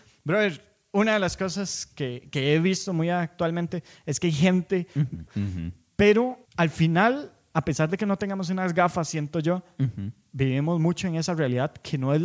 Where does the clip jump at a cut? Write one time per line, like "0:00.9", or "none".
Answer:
0:05.3
0:06.5